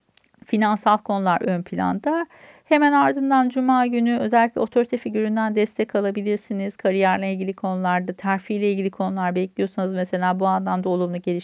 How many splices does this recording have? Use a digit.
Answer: 0